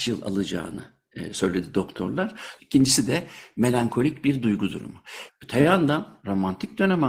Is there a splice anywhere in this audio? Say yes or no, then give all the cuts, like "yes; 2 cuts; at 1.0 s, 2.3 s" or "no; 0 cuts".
yes; 2 cuts; at 2.6 s, 5.3 s